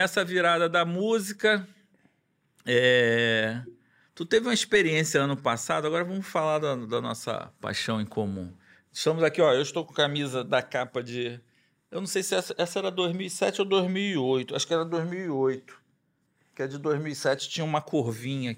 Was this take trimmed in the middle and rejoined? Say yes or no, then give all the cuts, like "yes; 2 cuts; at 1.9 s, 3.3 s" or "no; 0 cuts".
no; 0 cuts